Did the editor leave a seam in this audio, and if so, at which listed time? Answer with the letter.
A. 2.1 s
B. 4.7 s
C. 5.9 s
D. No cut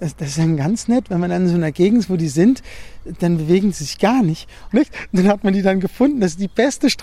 B